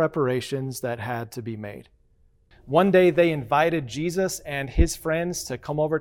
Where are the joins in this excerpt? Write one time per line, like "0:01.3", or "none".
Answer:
0:02.5

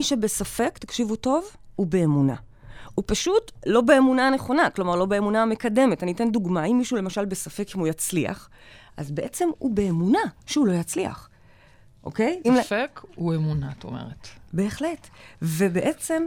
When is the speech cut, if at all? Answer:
0:12.4

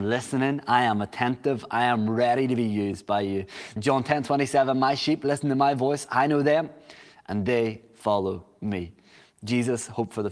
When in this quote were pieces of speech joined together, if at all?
0:03.8

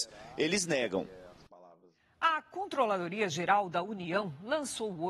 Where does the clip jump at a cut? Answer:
none

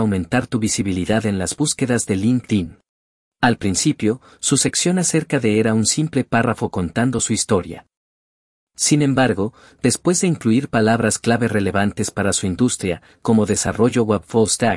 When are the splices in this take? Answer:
0:03.3

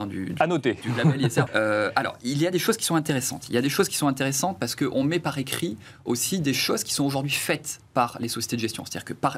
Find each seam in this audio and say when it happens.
0:01.5

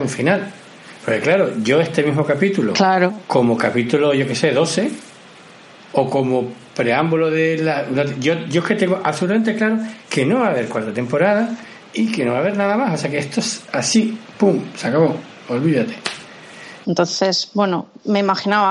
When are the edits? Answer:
0:16.8

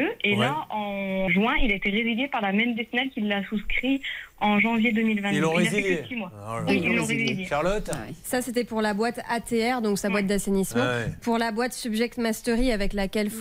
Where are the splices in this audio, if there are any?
0:01.3

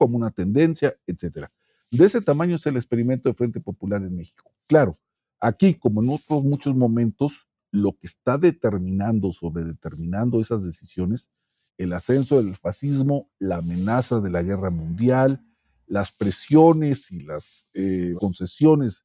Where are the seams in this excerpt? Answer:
0:11.7
0:18.2

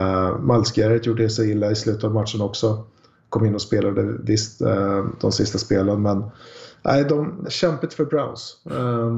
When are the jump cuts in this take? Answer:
0:07.4

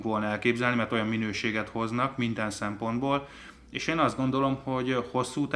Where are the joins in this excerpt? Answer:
none

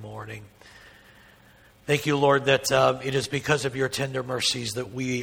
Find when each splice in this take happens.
none

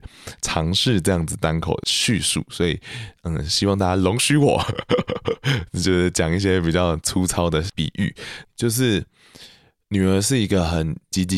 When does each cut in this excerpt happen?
0:08.4

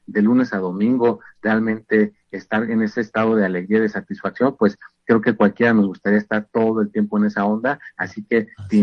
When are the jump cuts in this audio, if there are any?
none

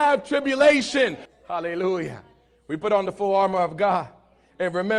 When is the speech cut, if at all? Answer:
0:01.3

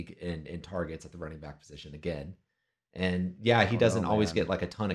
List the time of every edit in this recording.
none

